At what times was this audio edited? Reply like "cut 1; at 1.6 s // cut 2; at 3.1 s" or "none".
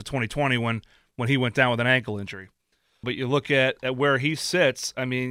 cut 1; at 3.0 s